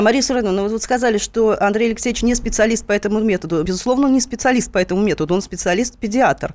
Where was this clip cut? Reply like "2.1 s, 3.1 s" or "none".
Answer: none